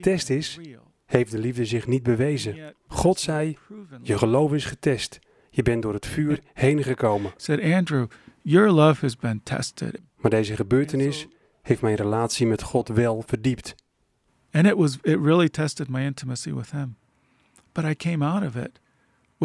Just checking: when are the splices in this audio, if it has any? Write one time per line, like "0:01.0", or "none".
0:02.9
0:10.0